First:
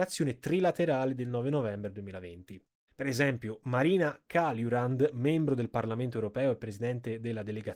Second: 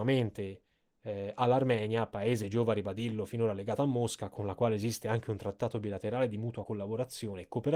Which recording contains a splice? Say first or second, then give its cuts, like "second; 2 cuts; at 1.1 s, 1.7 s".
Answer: first; 1 cut; at 2.9 s